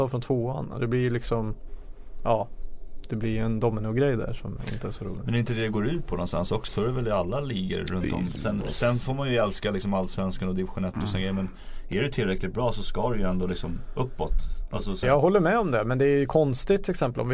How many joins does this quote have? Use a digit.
2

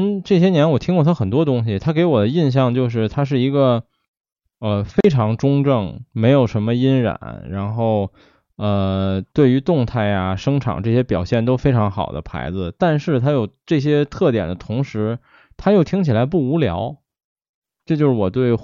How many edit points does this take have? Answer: 0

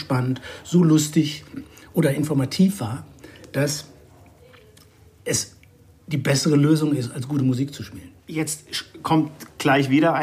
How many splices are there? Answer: 1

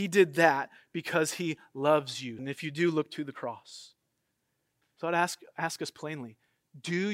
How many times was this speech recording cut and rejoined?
1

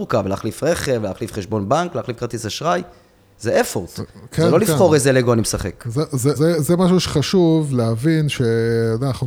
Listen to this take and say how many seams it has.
1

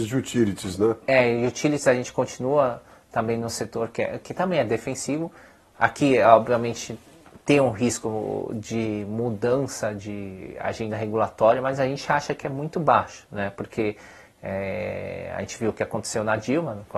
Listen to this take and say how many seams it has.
0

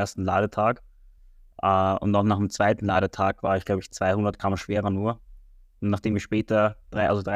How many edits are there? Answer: 0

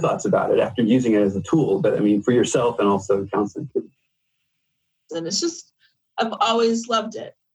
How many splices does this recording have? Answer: 1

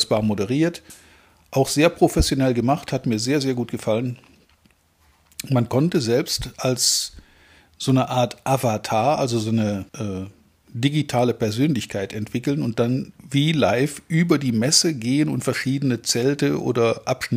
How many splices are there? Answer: 2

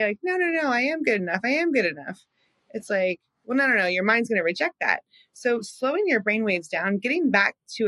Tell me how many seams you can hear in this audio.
0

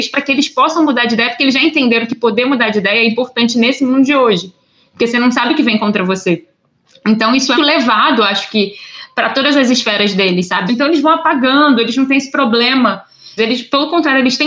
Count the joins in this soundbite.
3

